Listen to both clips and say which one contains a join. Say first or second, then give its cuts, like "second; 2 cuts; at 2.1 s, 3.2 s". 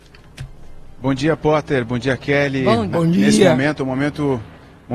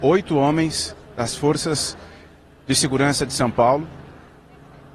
first; 1 cut; at 2.9 s